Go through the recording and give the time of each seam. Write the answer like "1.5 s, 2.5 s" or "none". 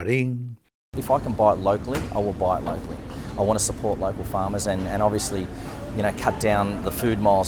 none